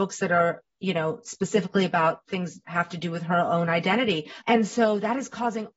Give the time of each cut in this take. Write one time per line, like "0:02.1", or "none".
0:04.4